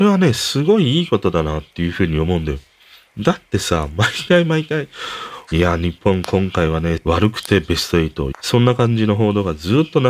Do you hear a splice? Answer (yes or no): yes